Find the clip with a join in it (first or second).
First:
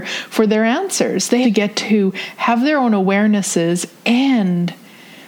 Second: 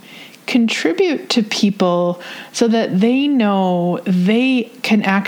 first